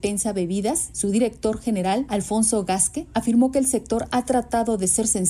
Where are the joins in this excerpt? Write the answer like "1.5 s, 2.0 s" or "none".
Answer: none